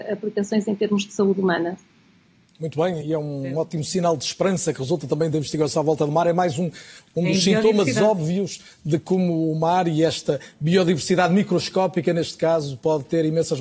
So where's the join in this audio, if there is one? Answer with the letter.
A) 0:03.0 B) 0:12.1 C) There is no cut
A